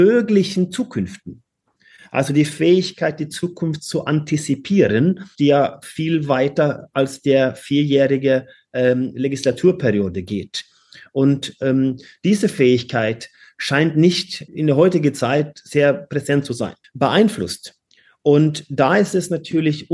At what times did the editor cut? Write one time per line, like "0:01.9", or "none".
0:05.4
0:14.5
0:16.8